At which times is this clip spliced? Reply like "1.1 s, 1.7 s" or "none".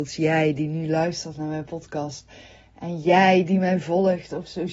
none